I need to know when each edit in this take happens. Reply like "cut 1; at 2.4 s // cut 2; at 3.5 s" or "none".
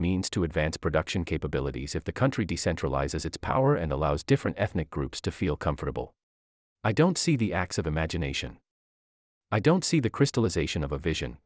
cut 1; at 6.8 s